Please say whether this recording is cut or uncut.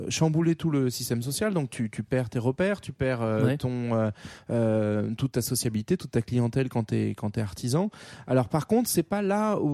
uncut